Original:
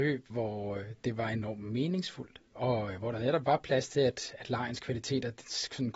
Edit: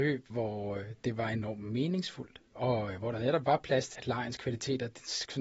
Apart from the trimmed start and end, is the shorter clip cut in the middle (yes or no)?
yes